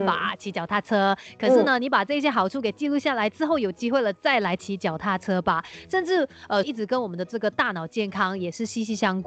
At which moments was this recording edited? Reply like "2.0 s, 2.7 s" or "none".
6.6 s